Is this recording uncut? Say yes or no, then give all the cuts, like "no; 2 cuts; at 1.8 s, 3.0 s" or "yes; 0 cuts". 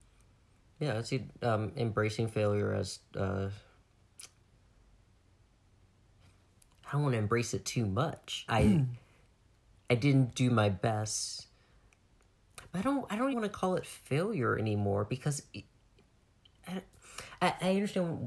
no; 2 cuts; at 8.5 s, 13.3 s